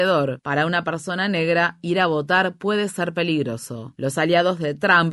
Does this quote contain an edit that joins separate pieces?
no; 0 cuts

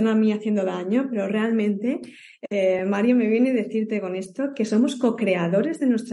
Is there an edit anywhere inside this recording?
no; 0 cuts

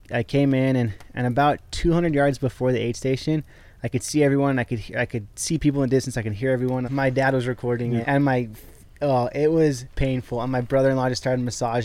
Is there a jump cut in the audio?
yes; 3 cuts; at 6.8 s, 8.0 s, 9.9 s

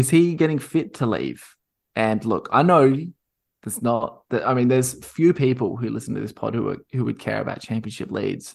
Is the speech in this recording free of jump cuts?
yes; 0 cuts

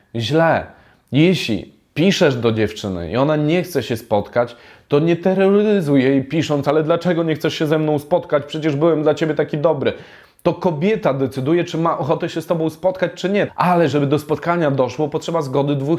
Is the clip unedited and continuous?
no; 1 cut; at 13.5 s

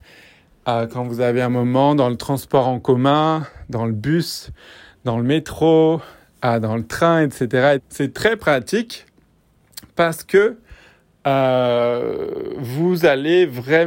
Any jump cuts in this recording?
yes; 1 cut; at 7.8 s

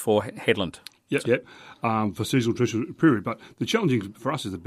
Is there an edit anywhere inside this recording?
yes; 1 cut; at 1.2 s

